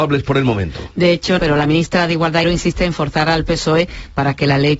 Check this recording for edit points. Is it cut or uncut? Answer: cut